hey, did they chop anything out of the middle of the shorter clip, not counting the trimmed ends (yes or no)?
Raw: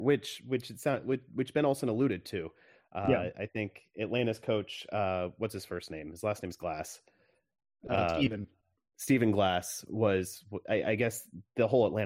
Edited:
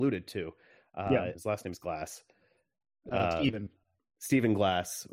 yes